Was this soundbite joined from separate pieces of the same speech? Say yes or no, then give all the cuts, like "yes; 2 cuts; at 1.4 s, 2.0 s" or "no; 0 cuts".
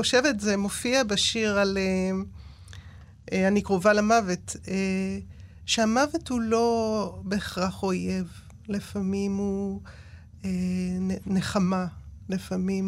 no; 0 cuts